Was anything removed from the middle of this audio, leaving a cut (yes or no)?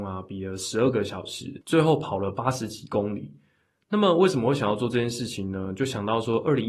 no